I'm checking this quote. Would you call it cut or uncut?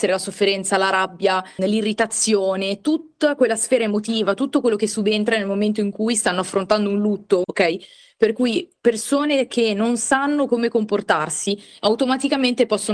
cut